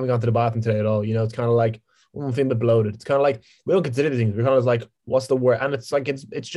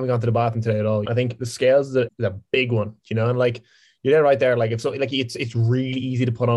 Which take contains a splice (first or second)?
second